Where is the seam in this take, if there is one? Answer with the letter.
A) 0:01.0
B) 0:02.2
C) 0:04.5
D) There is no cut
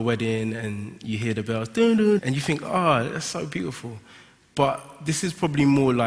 B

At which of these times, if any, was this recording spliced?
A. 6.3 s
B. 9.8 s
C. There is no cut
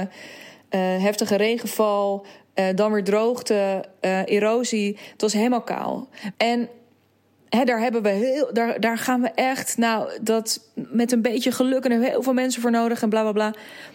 A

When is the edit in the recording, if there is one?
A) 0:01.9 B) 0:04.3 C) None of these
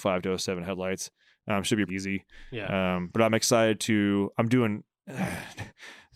A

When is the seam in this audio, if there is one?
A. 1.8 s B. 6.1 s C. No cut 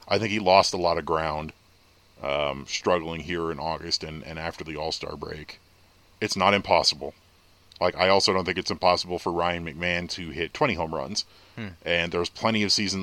C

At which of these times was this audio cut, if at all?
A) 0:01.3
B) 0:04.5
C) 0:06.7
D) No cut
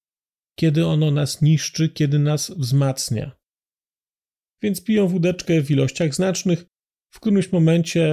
B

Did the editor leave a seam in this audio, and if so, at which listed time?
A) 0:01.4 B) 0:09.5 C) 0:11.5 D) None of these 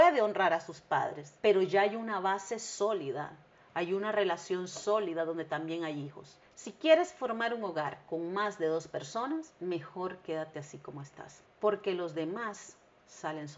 C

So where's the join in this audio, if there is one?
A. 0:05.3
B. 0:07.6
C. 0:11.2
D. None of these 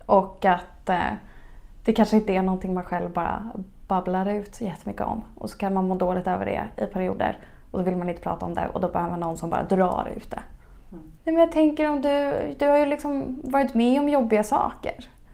C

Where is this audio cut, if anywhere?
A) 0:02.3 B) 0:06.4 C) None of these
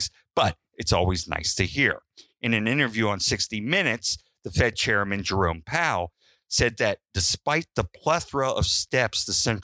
C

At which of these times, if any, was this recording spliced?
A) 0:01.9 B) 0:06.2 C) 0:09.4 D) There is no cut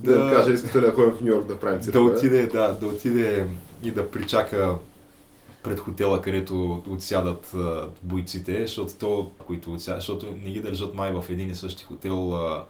C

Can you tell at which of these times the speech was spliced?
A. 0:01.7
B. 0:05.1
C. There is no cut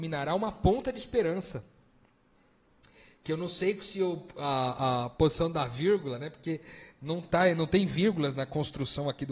C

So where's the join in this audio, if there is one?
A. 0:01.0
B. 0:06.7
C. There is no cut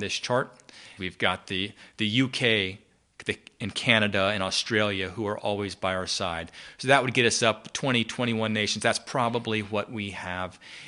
A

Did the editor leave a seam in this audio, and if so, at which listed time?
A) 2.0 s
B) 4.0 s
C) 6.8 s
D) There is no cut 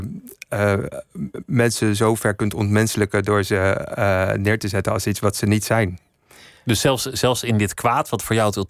D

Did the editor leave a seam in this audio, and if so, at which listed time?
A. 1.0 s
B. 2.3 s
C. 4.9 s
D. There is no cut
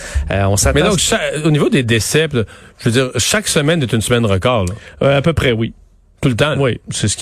D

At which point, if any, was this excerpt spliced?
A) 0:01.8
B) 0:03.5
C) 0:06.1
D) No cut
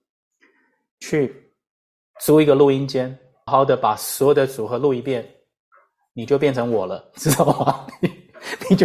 B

